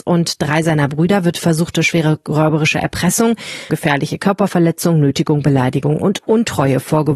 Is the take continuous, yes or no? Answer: no